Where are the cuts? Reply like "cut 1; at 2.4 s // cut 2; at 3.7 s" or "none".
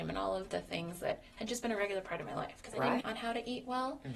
cut 1; at 3.0 s